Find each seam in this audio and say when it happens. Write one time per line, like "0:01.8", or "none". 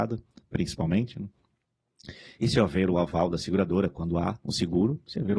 none